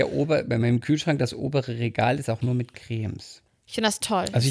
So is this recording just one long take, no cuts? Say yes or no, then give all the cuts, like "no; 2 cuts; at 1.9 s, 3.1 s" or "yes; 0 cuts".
no; 1 cut; at 3.5 s